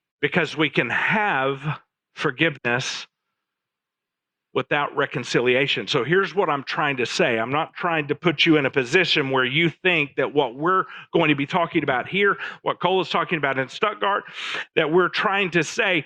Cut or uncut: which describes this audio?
uncut